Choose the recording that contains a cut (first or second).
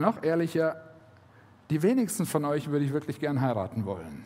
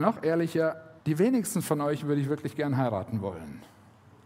second